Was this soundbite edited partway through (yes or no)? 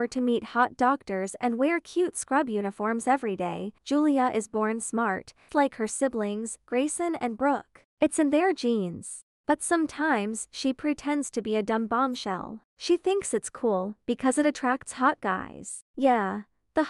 yes